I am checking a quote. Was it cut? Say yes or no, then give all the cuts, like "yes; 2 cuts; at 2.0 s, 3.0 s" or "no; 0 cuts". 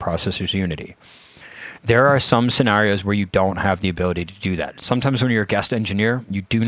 no; 0 cuts